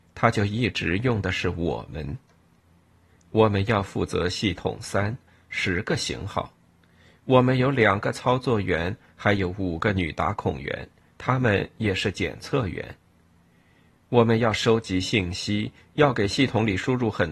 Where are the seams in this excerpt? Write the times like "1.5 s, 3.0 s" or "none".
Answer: none